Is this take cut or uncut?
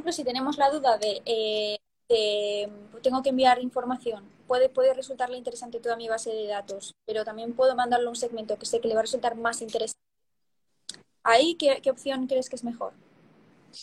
uncut